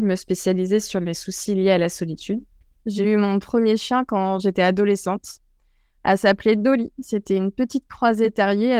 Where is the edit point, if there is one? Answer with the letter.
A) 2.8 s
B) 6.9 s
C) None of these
A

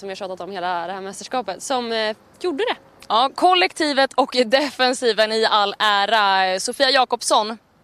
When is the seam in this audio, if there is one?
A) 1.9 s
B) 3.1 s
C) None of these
B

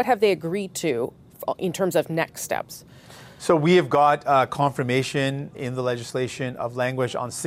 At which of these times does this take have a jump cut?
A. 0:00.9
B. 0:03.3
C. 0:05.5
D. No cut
C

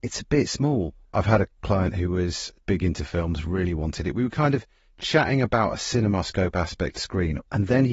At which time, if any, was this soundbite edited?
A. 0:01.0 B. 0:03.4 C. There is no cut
A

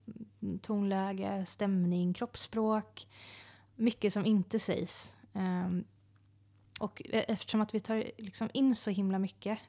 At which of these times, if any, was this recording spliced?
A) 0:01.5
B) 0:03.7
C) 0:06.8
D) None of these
C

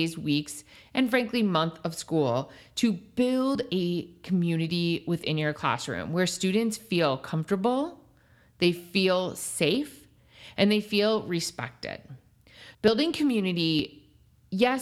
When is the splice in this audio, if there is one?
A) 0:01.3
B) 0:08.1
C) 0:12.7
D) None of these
C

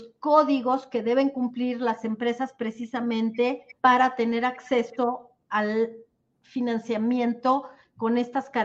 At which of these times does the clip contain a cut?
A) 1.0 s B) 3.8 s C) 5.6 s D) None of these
B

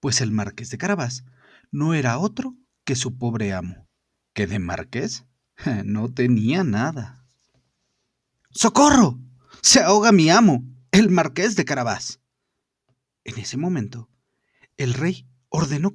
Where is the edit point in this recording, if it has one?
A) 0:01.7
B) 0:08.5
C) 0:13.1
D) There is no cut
B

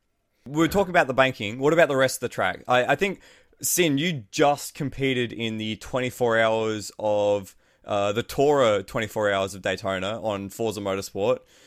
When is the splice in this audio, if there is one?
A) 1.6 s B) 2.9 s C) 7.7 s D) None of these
D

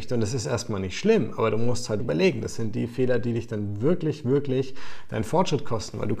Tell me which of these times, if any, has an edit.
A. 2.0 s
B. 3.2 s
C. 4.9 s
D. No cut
A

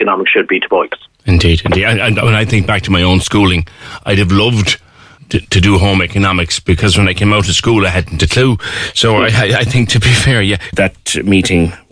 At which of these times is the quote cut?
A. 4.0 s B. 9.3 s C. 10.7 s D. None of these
C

